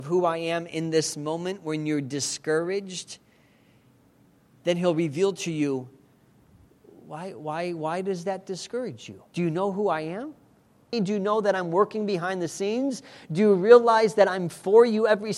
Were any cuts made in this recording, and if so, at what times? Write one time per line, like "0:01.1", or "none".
0:09.3
0:10.9

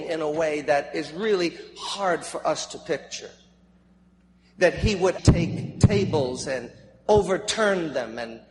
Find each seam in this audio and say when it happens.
0:05.2

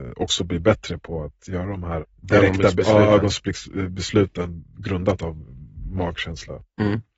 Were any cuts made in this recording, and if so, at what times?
0:02.0

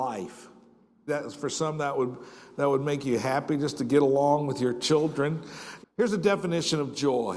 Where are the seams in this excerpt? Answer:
0:01.1
0:05.8

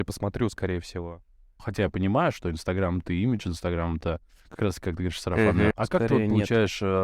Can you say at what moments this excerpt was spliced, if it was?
0:01.6
0:05.7

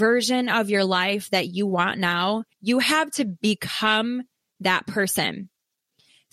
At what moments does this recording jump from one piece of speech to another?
0:02.5

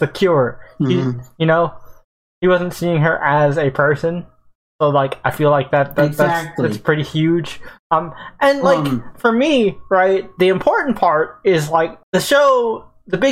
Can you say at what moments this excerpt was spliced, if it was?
0:12.0

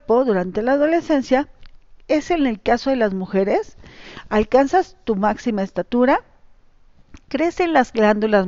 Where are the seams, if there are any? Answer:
none

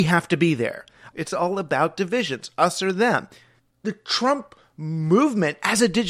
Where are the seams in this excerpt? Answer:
0:01.1

